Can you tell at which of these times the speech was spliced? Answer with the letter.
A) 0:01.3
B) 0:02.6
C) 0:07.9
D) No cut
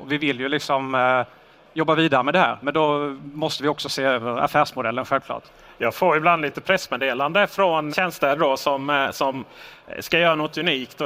C